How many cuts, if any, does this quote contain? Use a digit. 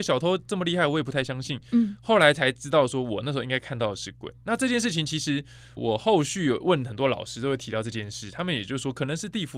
1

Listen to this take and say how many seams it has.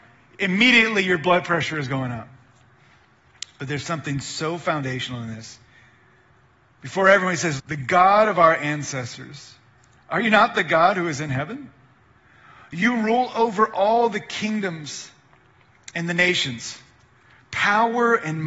1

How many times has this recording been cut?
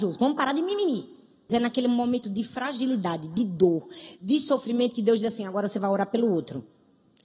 1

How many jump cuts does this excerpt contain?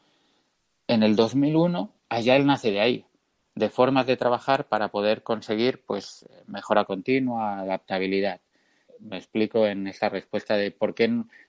1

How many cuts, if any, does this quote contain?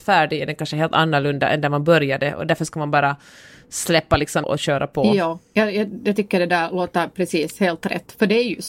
1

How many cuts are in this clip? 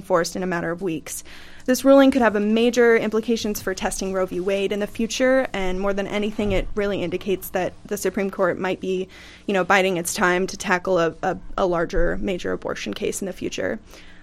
0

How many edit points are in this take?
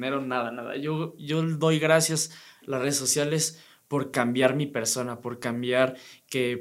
0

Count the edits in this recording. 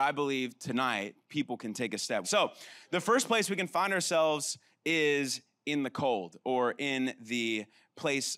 1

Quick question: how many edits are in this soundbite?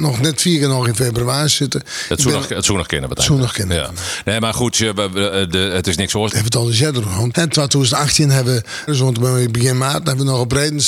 3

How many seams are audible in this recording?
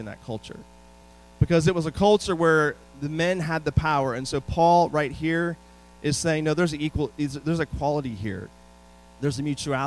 0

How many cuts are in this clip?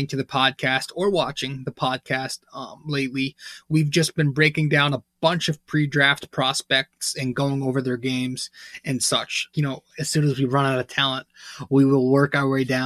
1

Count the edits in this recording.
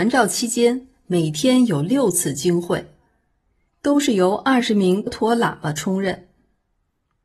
2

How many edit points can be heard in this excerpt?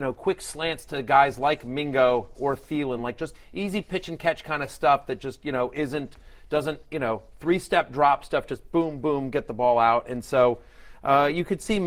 0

